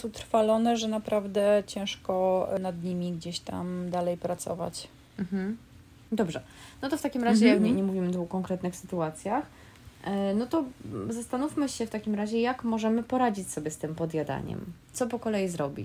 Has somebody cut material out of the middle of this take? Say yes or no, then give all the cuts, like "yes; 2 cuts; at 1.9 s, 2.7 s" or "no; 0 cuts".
yes; 1 cut; at 7.6 s